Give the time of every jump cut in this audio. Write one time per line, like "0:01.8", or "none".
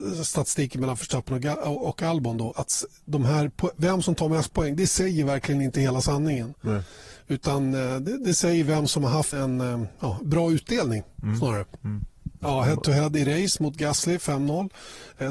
0:02.5
0:09.3
0:12.4